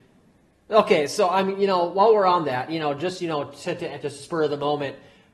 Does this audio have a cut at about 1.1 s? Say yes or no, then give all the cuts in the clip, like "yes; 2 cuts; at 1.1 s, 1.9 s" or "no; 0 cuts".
no; 1 cut; at 4.0 s